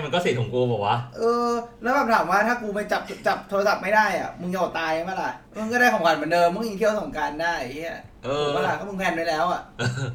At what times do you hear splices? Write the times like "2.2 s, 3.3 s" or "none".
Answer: 5.5 s